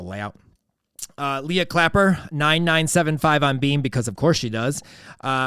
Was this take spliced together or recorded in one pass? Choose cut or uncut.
uncut